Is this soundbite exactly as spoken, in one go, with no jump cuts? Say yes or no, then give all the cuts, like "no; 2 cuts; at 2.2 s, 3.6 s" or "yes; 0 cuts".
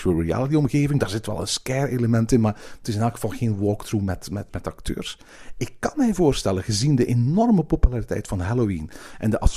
no; 1 cut; at 4.5 s